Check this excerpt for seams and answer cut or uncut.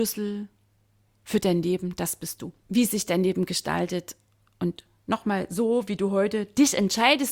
cut